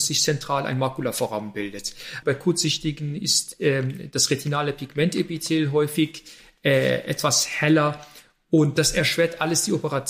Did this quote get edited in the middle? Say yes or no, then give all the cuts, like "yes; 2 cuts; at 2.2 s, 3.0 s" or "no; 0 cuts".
yes; 1 cut; at 2.2 s